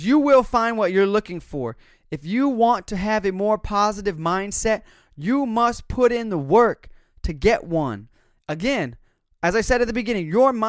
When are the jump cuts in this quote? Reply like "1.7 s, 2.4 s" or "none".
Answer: 8.4 s